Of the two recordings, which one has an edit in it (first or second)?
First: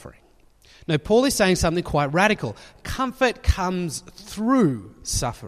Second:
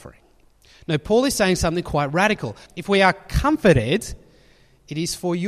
second